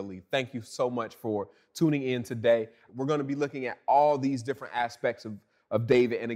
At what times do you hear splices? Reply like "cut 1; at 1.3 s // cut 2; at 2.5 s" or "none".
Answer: cut 1; at 2.9 s